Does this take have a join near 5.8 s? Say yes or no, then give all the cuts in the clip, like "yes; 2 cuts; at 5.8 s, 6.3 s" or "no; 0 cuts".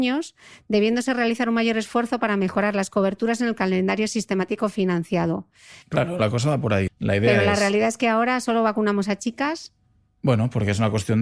yes; 2 cuts; at 5.8 s, 6.9 s